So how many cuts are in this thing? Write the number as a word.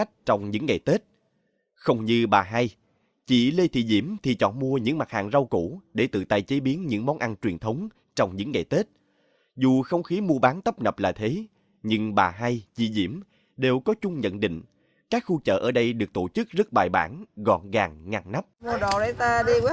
one